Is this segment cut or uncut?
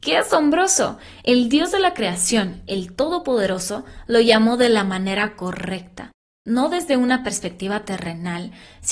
uncut